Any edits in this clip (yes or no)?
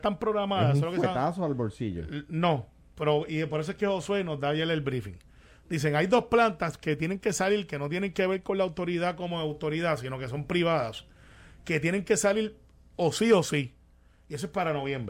no